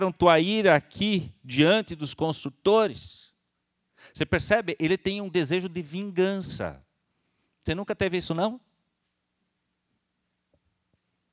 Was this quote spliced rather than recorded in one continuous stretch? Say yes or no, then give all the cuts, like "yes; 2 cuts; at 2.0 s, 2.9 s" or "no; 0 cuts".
no; 0 cuts